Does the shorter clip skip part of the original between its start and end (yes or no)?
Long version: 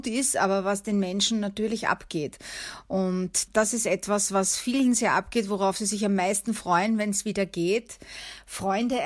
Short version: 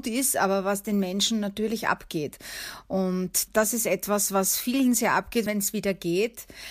yes